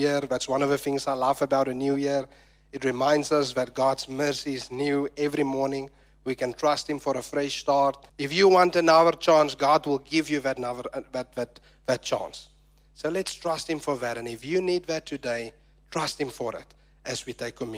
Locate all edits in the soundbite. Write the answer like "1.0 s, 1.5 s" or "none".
8.1 s